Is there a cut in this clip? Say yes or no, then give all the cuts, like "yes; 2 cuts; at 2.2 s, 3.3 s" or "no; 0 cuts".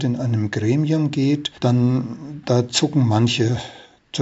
yes; 1 cut; at 1.6 s